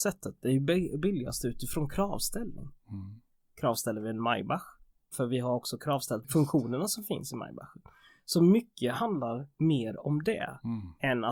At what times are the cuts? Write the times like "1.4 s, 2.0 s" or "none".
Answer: 3.4 s, 5.1 s

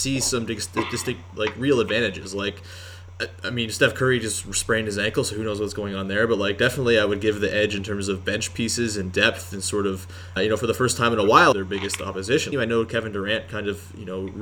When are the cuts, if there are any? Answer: 10.4 s, 11.5 s, 12.5 s

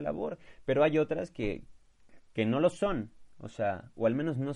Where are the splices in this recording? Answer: none

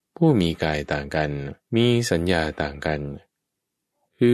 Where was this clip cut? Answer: 1.6 s

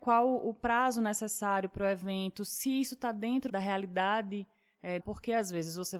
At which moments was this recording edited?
3.5 s, 5.0 s

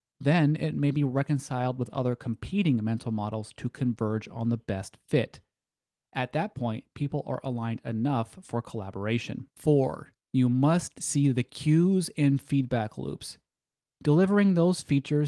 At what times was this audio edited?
9.5 s

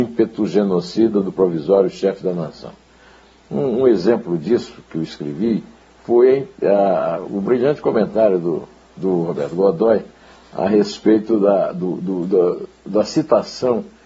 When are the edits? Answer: none

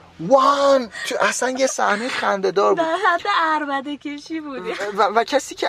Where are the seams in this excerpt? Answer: none

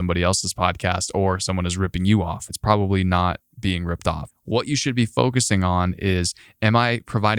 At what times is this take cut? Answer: 2.5 s, 4.3 s

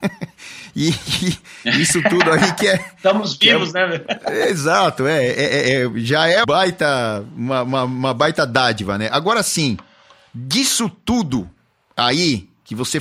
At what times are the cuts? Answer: 6.4 s

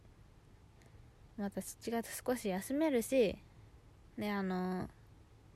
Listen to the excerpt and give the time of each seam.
none

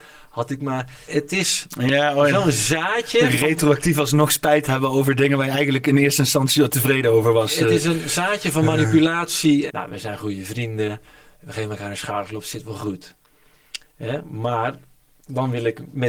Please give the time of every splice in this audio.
1.1 s, 9.7 s

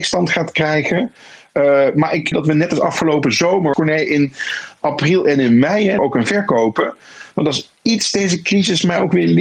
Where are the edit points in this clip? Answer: 2.3 s, 3.7 s, 6.0 s

